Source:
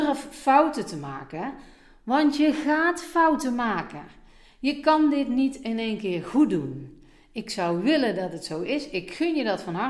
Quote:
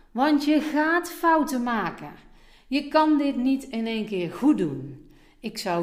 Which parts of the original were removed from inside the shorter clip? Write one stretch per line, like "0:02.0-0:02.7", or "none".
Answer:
none